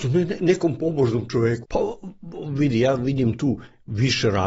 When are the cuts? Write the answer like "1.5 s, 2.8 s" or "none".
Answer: 1.6 s